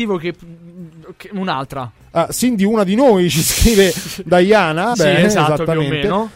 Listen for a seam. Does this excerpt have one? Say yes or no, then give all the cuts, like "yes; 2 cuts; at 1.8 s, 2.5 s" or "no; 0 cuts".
yes; 2 cuts; at 2.0 s, 4.9 s